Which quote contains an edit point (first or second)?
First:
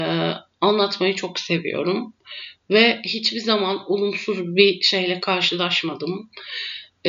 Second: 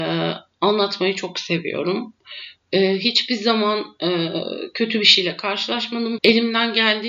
second